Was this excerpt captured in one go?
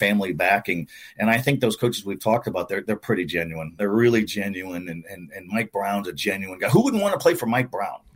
yes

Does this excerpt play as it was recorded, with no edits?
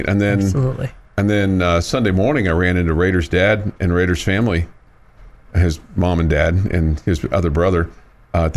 yes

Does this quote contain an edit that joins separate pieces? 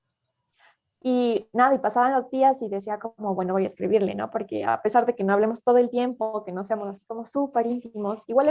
no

